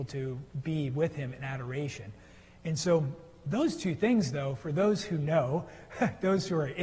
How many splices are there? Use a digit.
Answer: 0